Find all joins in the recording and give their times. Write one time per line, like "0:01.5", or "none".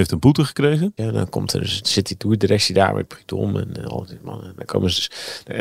0:01.0